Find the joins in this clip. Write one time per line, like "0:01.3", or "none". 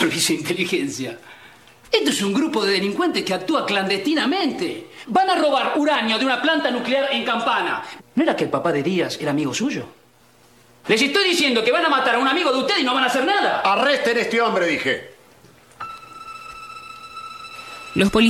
0:08.0